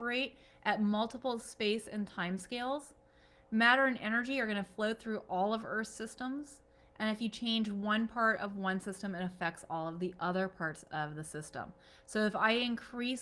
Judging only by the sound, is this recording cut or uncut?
uncut